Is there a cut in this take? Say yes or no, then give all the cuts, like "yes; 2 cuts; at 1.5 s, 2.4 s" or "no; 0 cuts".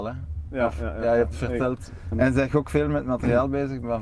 yes; 1 cut; at 2.1 s